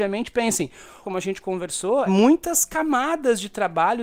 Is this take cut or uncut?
cut